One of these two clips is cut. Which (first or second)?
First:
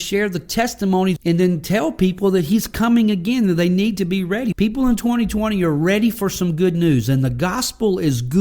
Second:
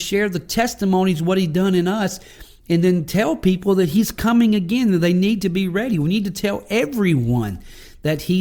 first